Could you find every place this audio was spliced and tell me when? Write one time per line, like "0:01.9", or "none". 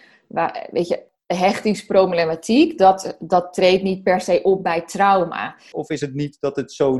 0:05.7